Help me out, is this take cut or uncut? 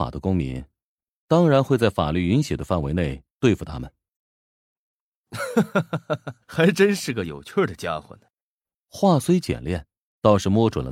cut